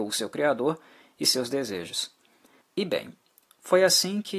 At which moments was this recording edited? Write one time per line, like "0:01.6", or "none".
0:02.6